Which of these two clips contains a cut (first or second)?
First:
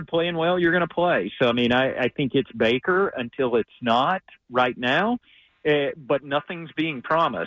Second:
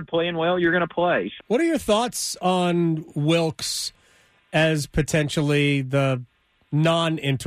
second